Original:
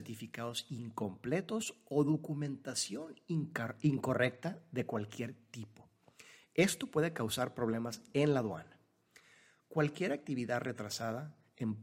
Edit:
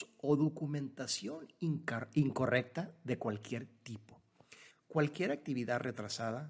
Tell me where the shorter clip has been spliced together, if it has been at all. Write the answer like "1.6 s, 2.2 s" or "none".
4.7 s